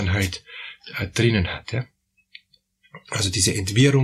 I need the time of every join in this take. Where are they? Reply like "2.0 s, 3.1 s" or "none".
none